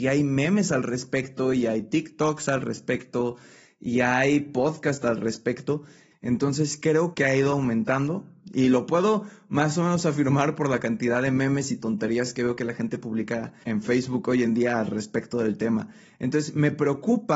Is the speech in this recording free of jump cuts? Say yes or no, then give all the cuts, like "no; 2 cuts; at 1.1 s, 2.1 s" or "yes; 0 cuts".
no; 3 cuts; at 6.1 s, 7.1 s, 13.6 s